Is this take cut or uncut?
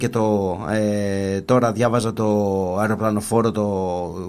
uncut